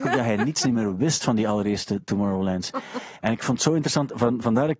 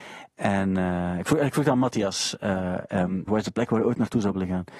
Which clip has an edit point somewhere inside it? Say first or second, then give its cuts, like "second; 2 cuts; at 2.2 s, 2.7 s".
second; 1 cut; at 3.3 s